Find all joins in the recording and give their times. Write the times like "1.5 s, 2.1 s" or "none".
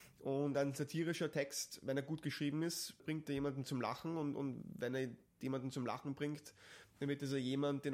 3.0 s